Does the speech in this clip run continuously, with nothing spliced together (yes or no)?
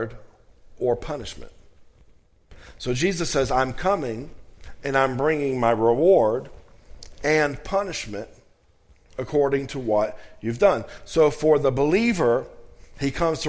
yes